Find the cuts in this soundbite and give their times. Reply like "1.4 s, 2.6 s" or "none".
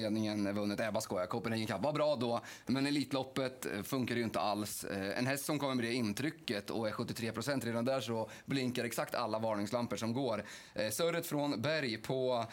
none